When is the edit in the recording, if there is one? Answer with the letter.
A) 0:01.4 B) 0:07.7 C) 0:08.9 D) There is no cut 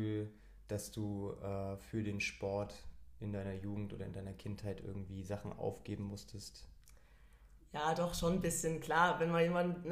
D